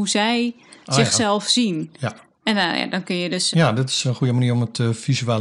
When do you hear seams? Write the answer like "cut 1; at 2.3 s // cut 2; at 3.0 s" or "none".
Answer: cut 1; at 3.5 s